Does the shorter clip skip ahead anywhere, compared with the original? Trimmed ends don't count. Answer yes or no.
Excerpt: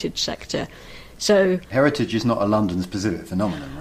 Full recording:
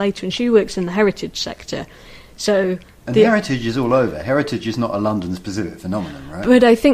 yes